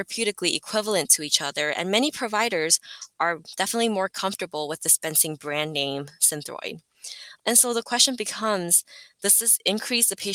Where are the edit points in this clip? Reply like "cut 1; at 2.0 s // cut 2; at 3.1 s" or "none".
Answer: cut 1; at 7.4 s